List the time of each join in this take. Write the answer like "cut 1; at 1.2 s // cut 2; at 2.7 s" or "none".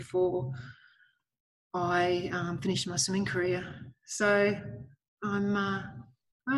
none